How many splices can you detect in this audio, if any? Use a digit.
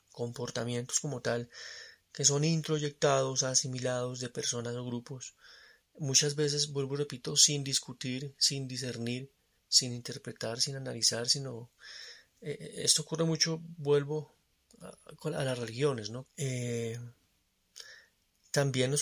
1